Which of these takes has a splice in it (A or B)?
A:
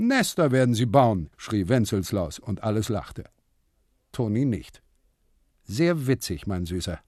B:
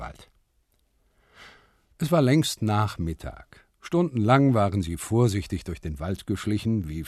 A